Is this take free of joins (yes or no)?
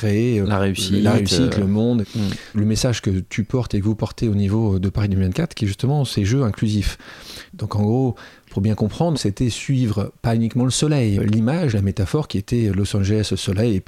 no